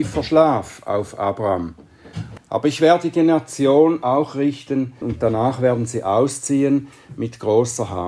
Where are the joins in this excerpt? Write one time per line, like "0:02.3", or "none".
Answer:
0:02.4
0:05.0